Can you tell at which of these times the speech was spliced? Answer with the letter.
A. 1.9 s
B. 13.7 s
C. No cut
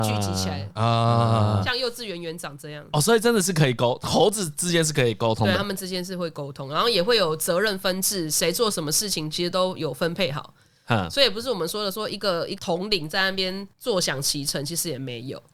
B